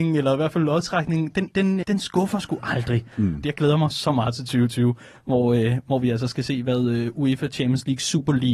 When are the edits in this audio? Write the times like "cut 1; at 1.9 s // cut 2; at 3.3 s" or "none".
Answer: cut 1; at 1.8 s // cut 2; at 3.4 s